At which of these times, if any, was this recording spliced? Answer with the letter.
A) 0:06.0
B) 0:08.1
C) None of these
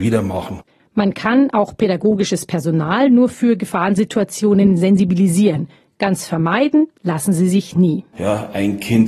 B